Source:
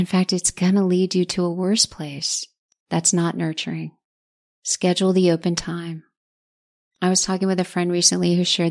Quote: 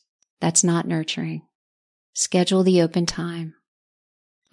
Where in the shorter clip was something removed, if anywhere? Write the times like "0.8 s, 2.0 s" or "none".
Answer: none